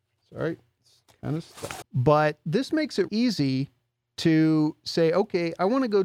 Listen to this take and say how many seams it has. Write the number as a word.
two